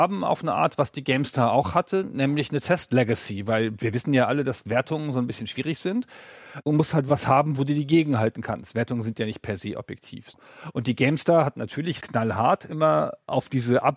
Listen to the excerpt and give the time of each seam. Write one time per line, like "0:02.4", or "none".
none